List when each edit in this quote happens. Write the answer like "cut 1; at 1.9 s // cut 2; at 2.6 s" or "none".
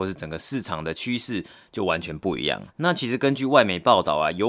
cut 1; at 2.7 s

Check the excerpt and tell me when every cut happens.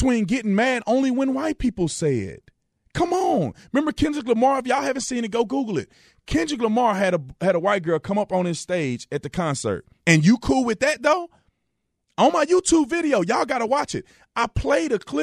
cut 1; at 10.0 s

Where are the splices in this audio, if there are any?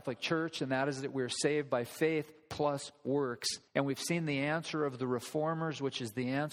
cut 1; at 3.7 s

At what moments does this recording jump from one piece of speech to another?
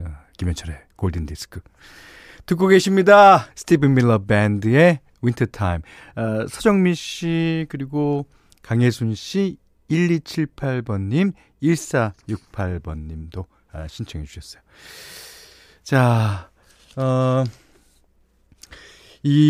cut 1; at 3.5 s

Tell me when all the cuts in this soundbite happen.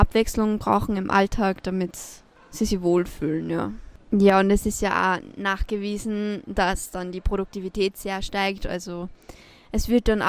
cut 1; at 4.1 s

